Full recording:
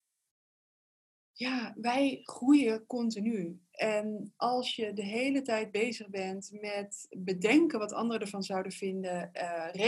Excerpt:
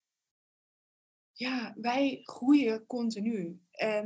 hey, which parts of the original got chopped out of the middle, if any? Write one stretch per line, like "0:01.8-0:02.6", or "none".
none